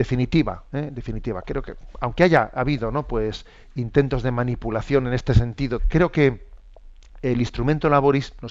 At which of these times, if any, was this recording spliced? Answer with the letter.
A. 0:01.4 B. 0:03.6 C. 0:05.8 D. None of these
C